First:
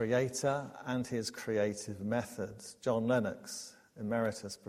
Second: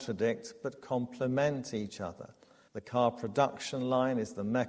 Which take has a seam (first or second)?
second